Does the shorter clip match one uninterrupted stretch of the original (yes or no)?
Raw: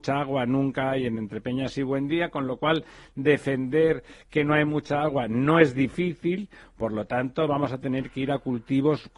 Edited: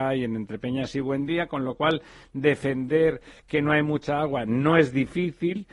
yes